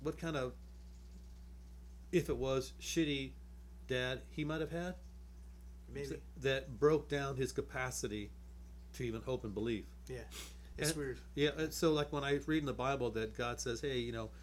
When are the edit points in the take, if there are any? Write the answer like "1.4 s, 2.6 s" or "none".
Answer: none